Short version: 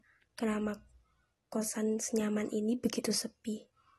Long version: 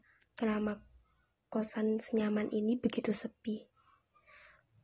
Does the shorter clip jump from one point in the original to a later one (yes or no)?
no